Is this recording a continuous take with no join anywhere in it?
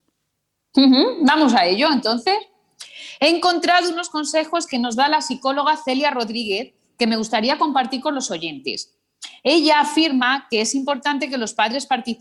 yes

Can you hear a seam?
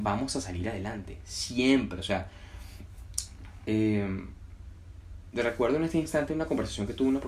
no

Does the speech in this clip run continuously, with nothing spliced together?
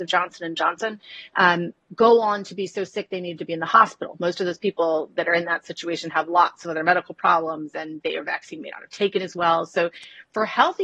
yes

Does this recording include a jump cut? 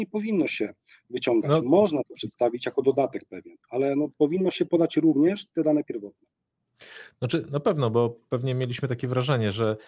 no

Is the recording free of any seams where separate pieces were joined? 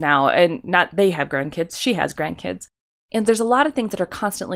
no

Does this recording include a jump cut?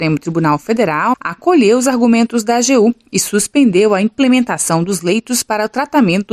yes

